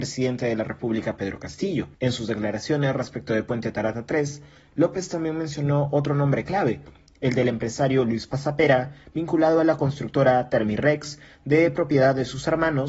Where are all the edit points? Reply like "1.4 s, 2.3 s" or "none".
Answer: 1.9 s

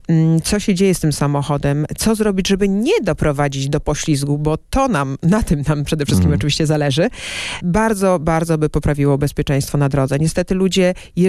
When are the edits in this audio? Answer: none

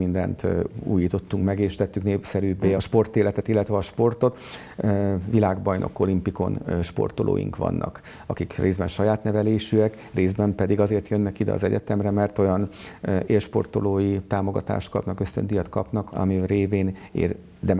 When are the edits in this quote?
2.7 s, 16.1 s

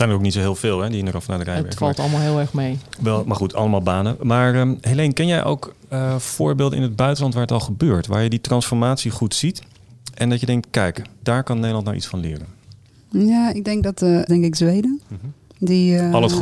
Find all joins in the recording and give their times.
14.3 s

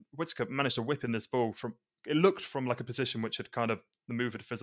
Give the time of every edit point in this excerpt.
none

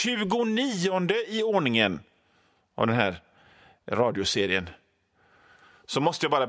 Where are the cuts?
none

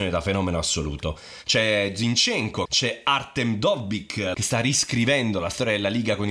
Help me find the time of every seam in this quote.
2.7 s, 4.3 s

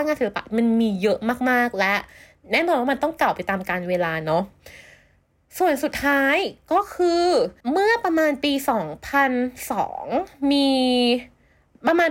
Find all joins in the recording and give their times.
7.6 s

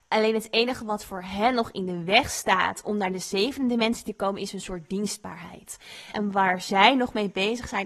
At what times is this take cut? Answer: 6.1 s

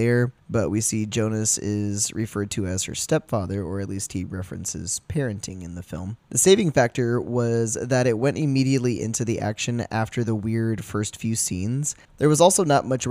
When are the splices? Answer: 6.2 s, 12.1 s

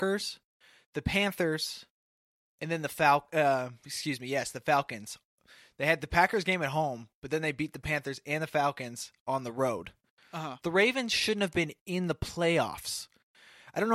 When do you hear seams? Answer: 10.6 s

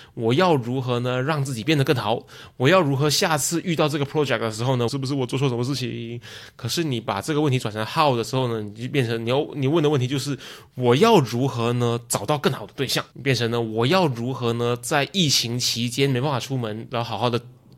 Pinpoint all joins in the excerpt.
4.9 s, 13.1 s

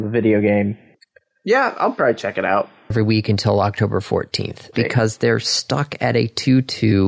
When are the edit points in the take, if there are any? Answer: 2.9 s, 4.7 s

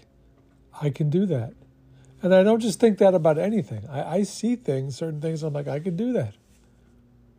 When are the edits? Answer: none

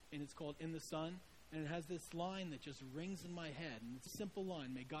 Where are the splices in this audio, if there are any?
4.1 s

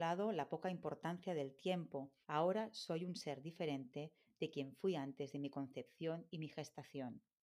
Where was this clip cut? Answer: 2.2 s

